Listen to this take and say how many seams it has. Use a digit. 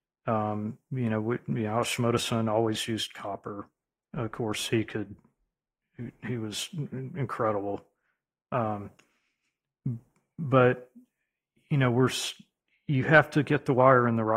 0